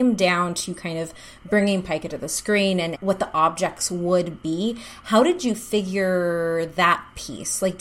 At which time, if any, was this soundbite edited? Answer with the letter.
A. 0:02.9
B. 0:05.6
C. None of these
A